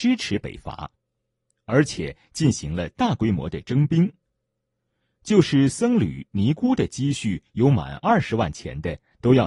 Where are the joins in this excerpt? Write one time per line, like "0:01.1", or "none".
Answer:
none